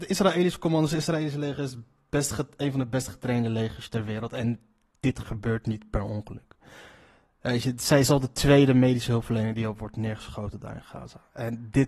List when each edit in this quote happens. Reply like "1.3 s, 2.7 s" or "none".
none